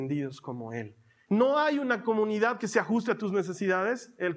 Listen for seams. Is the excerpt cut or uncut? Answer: cut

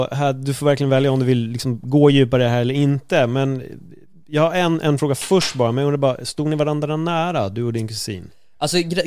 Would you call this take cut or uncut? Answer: uncut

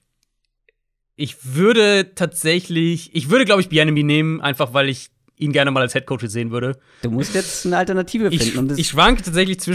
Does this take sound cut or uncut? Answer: cut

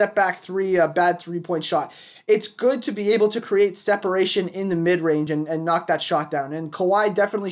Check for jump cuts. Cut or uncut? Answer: uncut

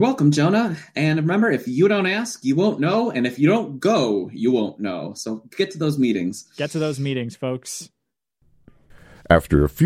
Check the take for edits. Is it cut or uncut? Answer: uncut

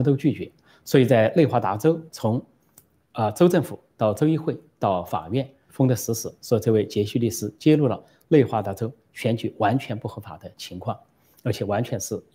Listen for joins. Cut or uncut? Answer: cut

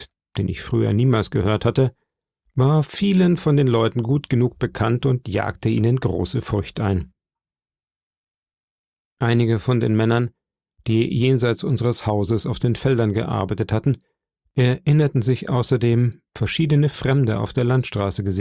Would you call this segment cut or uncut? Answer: uncut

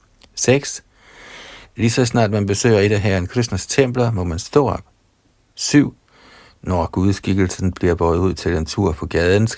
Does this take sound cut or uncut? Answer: uncut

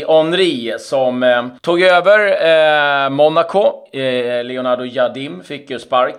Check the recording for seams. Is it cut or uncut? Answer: cut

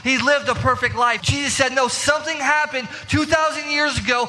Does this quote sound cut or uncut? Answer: cut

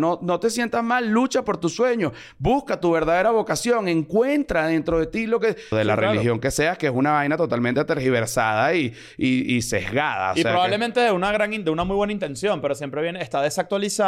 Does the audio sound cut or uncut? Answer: cut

